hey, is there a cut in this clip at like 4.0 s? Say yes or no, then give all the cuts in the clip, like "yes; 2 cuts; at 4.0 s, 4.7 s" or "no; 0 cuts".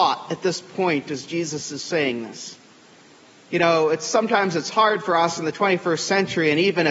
no; 0 cuts